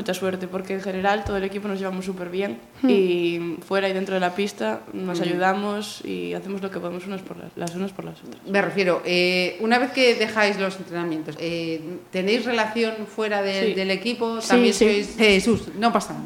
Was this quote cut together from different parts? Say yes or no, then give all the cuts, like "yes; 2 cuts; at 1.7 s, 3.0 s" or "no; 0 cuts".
yes; 2 cuts; at 11.4 s, 15.2 s